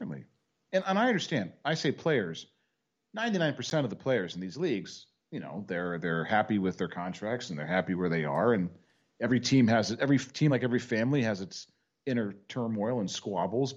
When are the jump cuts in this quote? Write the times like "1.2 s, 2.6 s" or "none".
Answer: none